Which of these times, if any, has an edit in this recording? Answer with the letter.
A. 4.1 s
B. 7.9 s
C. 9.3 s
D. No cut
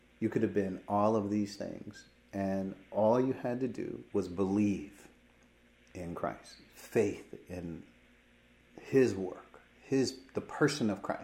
A